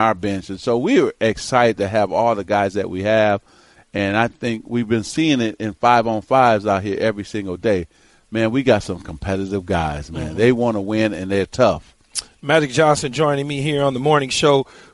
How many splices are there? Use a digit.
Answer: 0